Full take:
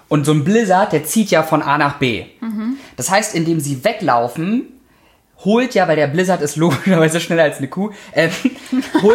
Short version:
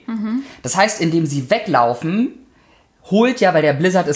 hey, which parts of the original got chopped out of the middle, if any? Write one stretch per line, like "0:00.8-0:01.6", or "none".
none